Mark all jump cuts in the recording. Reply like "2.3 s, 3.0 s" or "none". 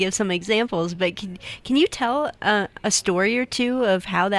none